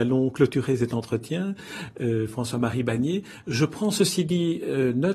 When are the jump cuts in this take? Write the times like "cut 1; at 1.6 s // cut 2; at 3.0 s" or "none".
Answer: none